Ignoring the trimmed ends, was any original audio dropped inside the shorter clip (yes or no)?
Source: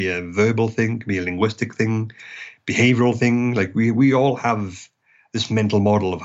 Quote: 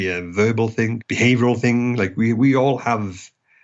yes